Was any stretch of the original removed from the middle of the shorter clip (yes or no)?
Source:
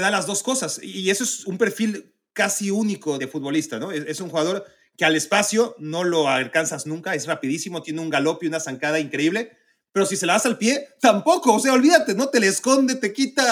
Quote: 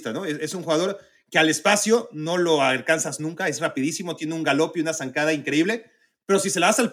no